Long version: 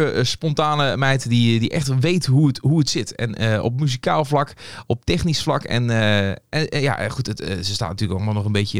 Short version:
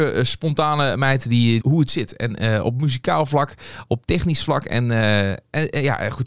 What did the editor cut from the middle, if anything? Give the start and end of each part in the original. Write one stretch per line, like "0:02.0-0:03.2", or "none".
0:01.6-0:02.6